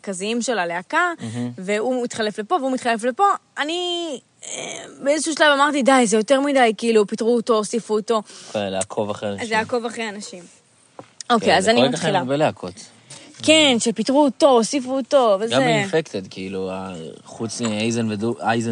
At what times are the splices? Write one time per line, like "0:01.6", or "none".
none